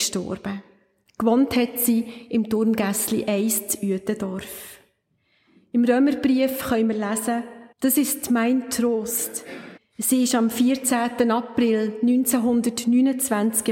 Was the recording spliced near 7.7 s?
yes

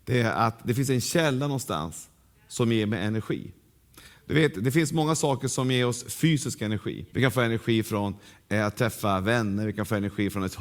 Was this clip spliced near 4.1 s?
no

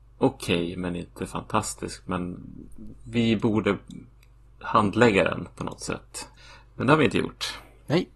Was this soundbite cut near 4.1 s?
no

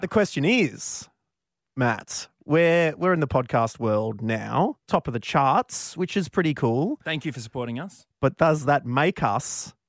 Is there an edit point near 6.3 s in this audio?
no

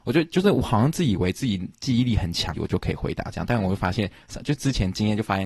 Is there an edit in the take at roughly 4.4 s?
no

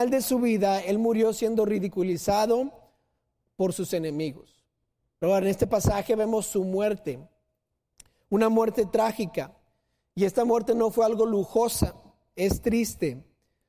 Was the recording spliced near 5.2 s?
yes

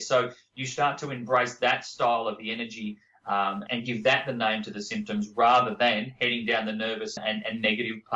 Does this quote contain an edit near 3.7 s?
yes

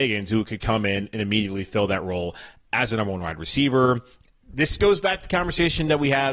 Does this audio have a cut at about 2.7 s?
no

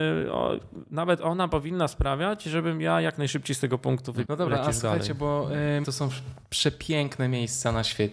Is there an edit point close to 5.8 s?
yes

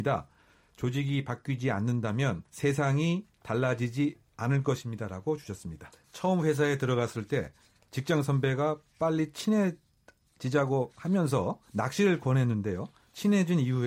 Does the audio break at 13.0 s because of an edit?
no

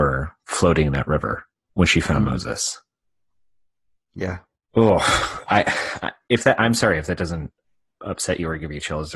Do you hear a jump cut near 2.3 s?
no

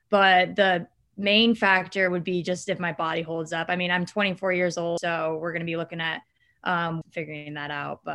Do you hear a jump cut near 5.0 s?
yes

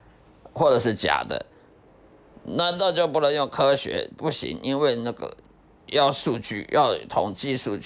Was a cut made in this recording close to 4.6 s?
no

